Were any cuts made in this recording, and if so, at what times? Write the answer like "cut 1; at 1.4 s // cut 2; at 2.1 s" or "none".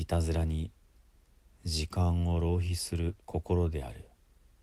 cut 1; at 3.2 s